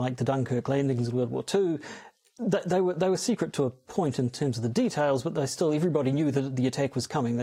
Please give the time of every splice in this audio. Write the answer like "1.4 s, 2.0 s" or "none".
none